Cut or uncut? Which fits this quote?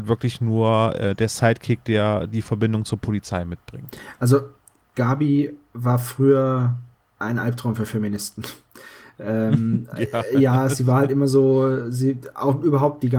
uncut